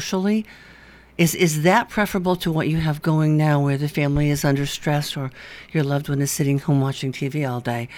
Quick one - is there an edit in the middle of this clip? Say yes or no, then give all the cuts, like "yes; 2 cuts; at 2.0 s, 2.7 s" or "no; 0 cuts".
no; 0 cuts